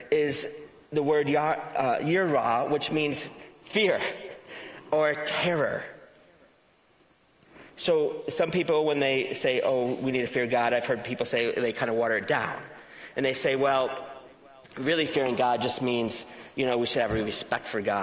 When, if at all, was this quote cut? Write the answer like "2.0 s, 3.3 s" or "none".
none